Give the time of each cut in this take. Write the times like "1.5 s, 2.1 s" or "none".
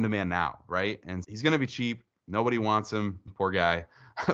1.2 s, 3.3 s